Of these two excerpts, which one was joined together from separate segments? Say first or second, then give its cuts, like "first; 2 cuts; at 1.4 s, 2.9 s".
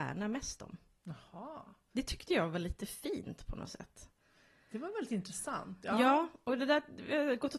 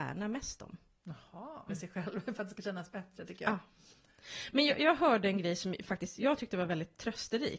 second; 1 cut; at 1.7 s